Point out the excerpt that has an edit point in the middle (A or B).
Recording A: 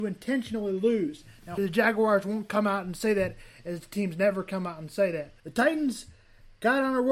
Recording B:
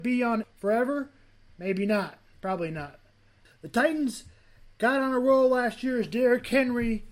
A